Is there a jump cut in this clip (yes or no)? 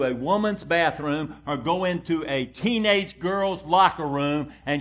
no